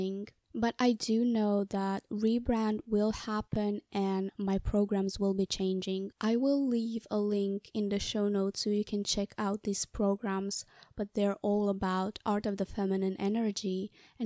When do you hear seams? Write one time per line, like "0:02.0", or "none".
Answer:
0:06.1